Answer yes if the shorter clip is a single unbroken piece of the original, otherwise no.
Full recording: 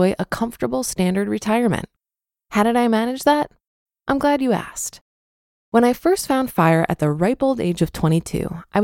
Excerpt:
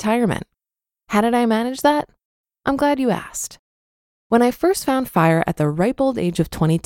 yes